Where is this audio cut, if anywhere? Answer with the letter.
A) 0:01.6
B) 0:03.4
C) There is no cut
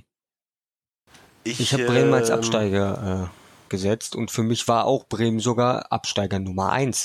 C